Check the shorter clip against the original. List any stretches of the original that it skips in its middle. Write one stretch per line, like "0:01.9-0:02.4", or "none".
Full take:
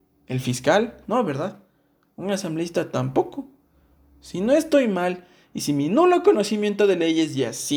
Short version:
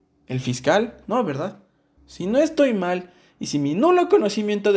0:02.0-0:04.1